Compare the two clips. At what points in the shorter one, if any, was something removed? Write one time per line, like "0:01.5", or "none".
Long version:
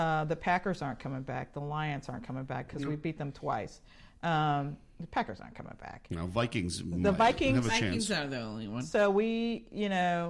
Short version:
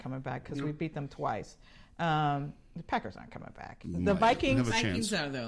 0:03.8